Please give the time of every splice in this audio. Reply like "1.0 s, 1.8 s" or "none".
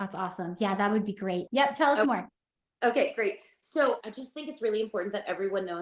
1.5 s, 4.0 s